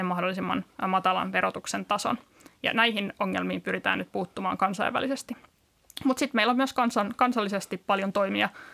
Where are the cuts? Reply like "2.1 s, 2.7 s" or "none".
none